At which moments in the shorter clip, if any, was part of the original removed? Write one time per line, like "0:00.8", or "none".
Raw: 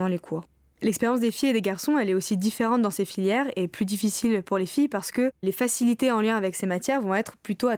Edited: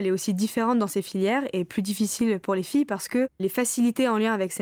none